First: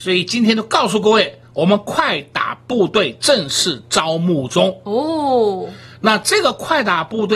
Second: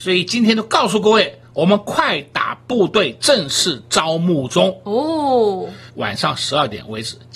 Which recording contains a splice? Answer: second; 1 cut; at 5.9 s

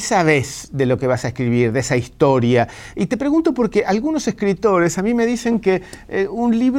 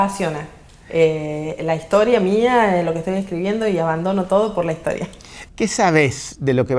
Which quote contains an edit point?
second; 1 cut; at 5.5 s

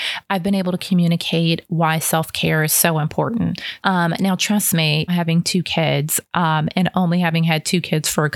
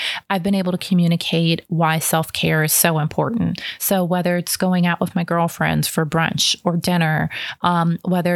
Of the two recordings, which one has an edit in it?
first; 2 cuts; at 3.8 s, 5.1 s

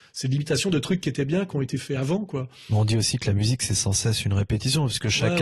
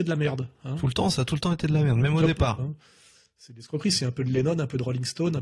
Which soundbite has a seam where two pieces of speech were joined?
second; 1 cut; at 2.6 s

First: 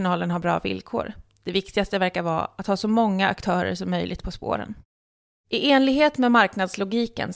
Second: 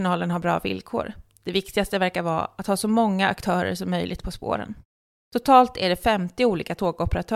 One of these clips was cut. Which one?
second; 1 cut; at 5.2 s

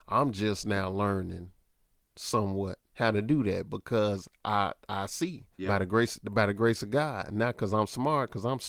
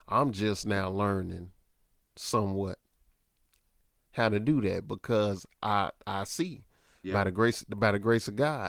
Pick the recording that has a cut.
first; 2 cuts; at 2.9 s, 5.5 s

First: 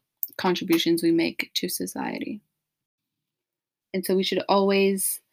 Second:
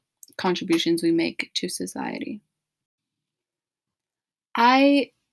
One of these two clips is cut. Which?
first; 1 cut; at 3.8 s

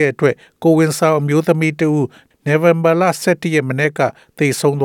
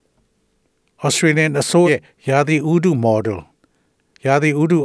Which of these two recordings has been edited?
second; 1 cut; at 1.9 s

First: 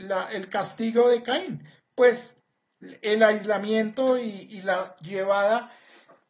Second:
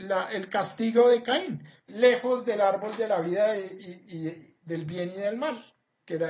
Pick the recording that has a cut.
second; 1 cut; at 1.9 s

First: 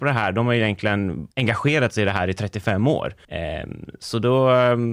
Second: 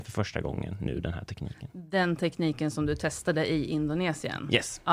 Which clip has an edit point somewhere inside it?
first; 2 cuts; at 1.3 s, 3.2 s

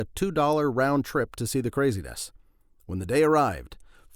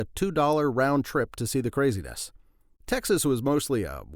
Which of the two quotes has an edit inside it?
second; 1 cut; at 2.8 s

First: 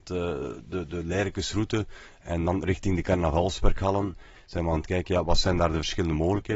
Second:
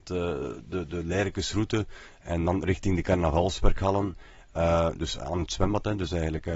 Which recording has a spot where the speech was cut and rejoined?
first; 1 cut; at 4.4 s

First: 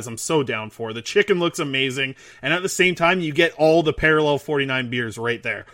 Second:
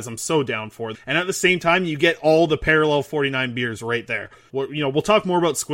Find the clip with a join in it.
second; 2 cuts; at 0.9 s, 4.5 s

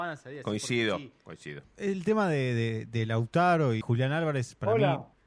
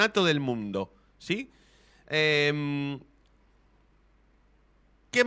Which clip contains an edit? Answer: first; 2 cuts; at 1.6 s, 3.8 s

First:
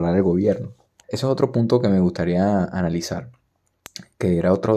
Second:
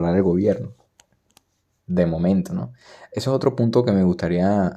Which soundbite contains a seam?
first; 1 cut; at 1.0 s

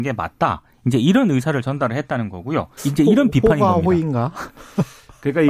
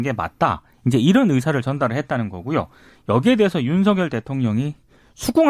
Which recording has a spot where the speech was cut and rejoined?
first; 1 cut; at 2.8 s

